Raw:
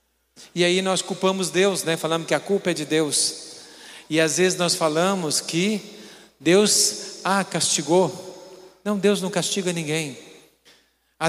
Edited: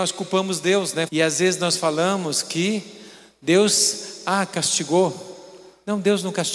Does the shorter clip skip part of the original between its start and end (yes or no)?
yes